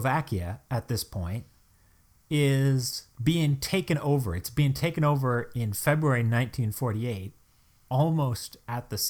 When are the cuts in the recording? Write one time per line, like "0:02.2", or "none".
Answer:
none